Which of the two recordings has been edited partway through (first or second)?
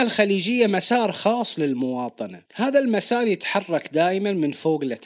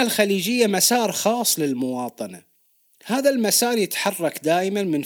first